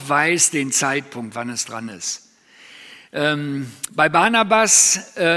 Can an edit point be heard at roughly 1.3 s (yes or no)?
no